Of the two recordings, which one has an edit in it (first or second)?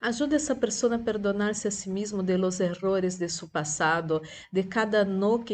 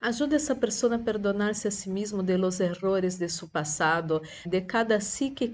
second